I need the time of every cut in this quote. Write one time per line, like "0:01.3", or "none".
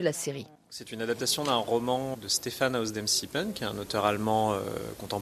0:02.1